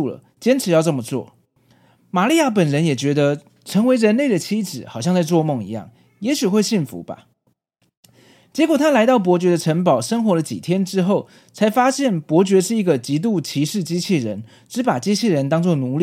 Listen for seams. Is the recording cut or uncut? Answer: uncut